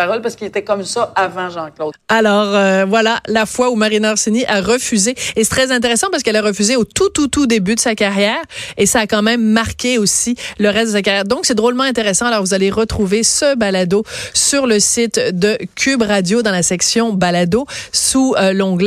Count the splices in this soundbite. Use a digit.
1